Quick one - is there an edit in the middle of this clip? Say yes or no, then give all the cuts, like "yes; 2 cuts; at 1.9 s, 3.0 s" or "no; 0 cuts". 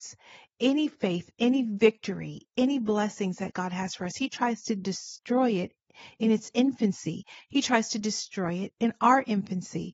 no; 0 cuts